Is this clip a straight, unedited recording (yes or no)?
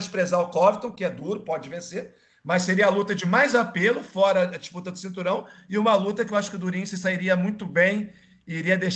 yes